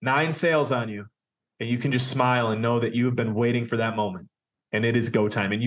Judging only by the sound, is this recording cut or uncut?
uncut